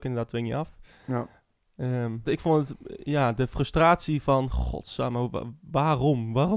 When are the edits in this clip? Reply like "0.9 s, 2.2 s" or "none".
2.2 s